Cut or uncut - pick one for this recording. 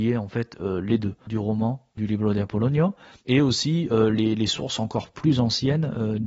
cut